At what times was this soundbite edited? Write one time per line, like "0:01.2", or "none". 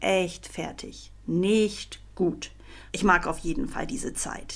0:01.2
0:02.9